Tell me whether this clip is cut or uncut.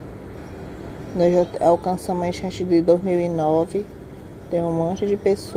uncut